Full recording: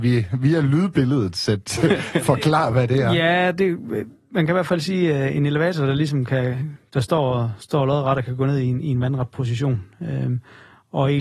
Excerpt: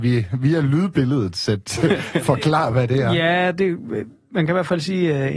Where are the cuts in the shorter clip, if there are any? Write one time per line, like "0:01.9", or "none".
none